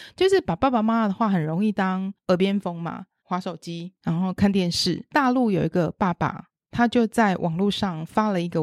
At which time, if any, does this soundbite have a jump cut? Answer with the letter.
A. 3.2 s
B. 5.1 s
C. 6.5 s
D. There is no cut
A